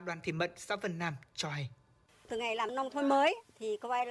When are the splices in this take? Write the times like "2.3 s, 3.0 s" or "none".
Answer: none